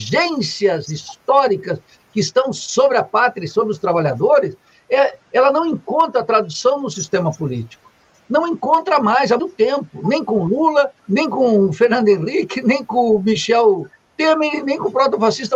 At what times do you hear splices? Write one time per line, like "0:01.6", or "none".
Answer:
0:09.4
0:11.0